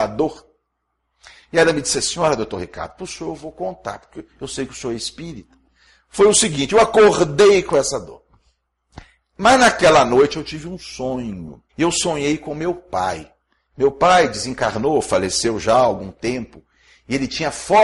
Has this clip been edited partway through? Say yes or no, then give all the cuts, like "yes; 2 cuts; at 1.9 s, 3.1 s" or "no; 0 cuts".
yes; 1 cut; at 11.7 s